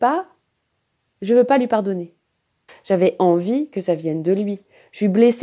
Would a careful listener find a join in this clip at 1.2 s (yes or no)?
no